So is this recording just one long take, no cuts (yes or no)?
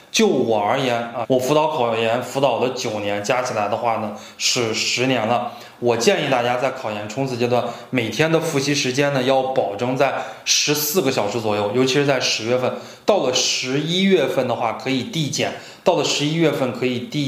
no